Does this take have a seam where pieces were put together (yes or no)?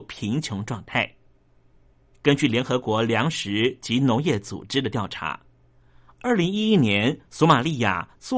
no